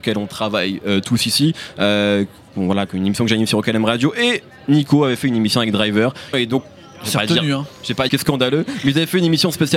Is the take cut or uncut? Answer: cut